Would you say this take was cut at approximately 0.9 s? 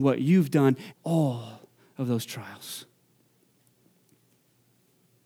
yes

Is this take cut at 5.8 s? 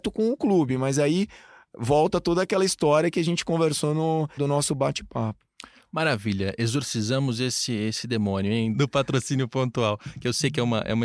no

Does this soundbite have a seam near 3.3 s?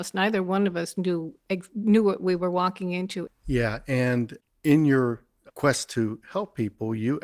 yes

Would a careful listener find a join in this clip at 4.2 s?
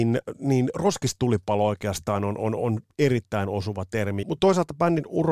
yes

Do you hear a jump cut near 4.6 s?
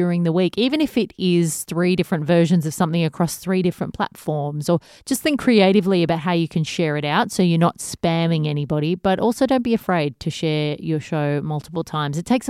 no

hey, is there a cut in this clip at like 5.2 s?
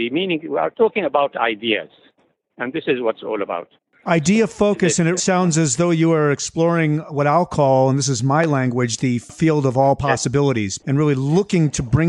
yes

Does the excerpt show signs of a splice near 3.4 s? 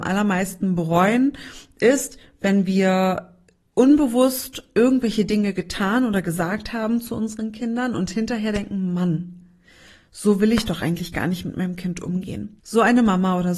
no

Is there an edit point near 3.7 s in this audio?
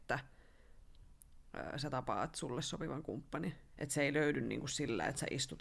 yes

